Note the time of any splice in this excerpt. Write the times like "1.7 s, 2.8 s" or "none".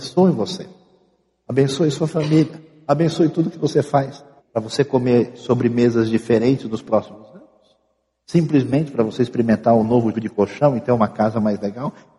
4.4 s, 8.2 s, 10.1 s